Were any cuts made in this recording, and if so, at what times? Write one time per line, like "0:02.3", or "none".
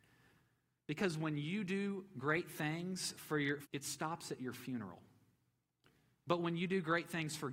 0:03.6